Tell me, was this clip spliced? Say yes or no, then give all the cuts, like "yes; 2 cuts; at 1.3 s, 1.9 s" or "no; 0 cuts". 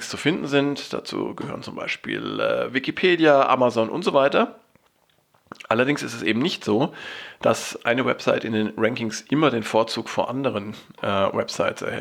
no; 0 cuts